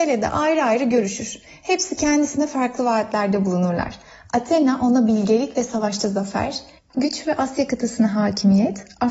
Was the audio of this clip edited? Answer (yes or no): yes